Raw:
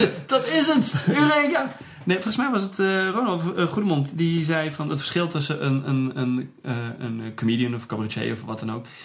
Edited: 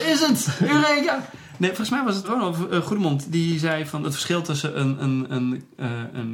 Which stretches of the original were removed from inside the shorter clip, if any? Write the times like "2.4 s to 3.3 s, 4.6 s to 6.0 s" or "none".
2.7 s to 3.1 s